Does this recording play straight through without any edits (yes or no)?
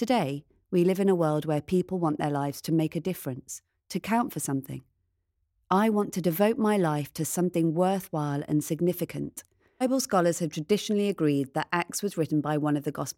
no